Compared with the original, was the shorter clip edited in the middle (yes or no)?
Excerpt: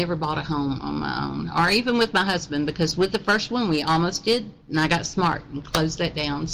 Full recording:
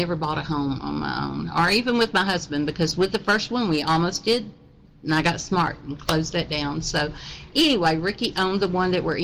yes